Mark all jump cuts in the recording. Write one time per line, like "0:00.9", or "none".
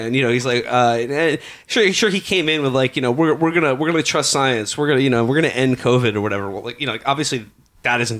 none